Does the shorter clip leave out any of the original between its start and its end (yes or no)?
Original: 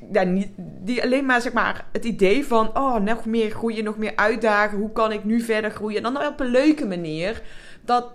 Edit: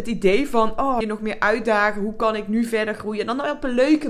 yes